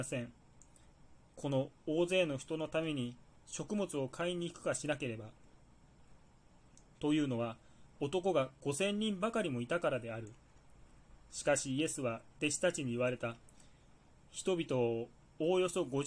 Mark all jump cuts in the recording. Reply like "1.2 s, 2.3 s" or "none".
none